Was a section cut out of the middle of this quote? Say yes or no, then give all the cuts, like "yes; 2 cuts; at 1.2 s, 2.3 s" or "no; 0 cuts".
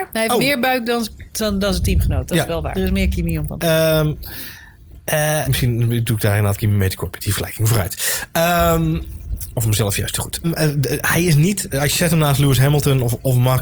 yes; 3 cuts; at 2.7 s, 5.4 s, 10.4 s